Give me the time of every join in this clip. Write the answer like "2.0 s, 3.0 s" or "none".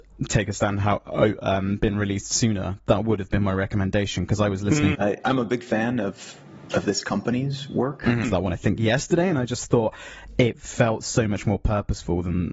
4.9 s, 8.2 s